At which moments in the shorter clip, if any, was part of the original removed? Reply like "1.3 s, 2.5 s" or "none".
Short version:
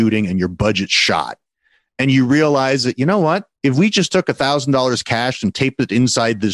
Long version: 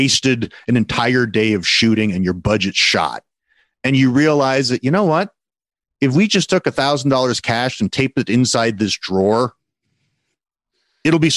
3.5 s